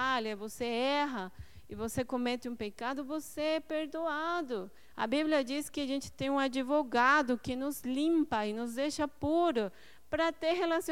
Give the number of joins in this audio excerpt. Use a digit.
0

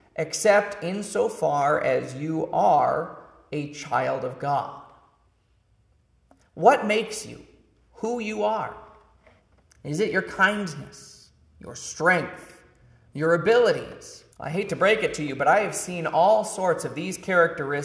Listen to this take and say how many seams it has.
1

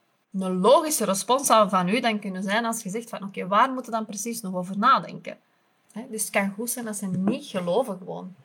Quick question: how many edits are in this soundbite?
1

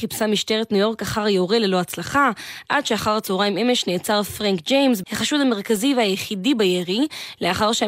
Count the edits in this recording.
1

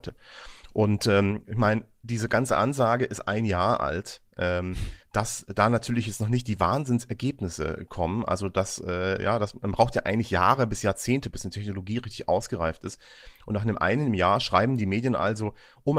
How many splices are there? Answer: 0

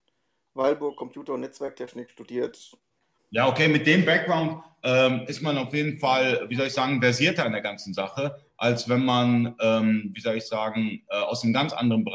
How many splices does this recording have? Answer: 1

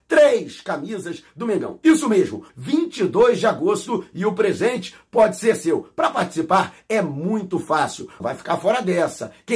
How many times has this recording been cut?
2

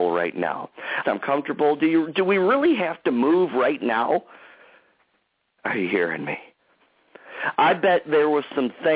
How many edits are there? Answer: 1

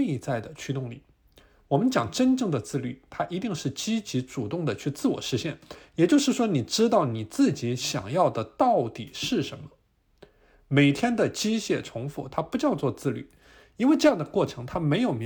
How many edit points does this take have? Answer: 0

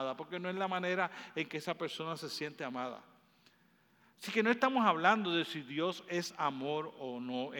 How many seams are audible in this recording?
0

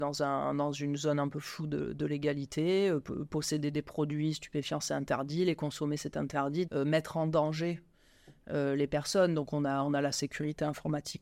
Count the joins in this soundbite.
1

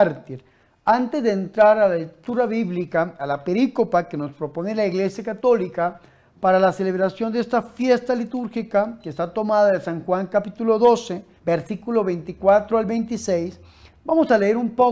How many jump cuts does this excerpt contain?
1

